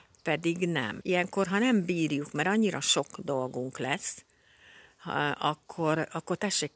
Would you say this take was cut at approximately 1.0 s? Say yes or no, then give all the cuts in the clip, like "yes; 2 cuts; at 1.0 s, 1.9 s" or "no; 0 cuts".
yes; 1 cut; at 1.0 s